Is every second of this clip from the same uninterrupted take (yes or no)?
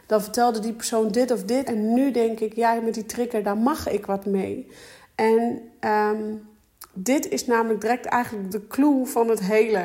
no